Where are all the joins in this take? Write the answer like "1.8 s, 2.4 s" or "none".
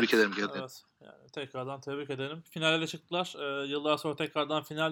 none